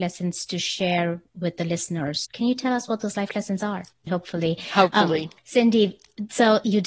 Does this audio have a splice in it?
yes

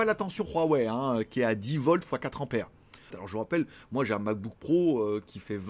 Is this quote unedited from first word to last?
no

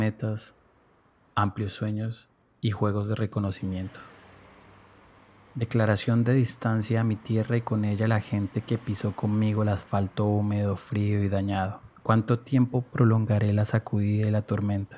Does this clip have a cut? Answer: yes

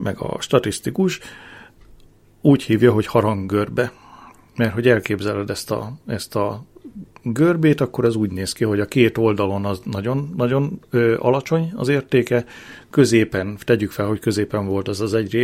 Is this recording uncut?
yes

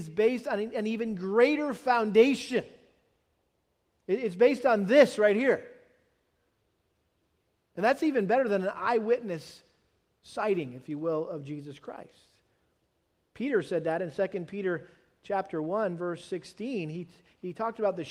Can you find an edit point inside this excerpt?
no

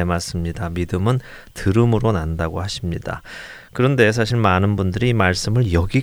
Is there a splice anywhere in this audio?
no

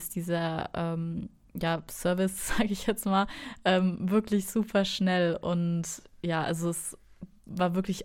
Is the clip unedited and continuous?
yes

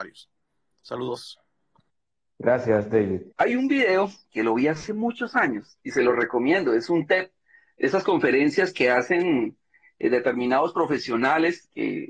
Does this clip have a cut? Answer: yes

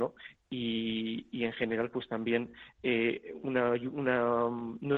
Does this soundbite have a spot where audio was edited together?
no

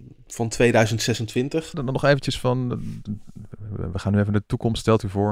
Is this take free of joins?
no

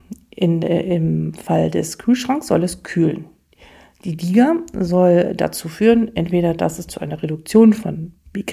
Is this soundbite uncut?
yes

